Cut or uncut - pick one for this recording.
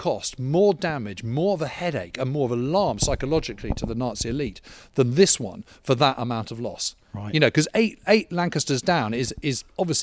uncut